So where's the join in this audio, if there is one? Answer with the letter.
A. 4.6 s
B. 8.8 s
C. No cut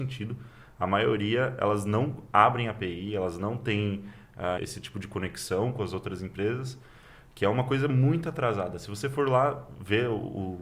A